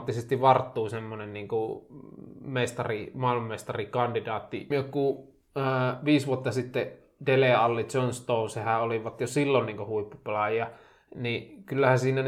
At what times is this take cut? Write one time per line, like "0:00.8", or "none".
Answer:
0:04.7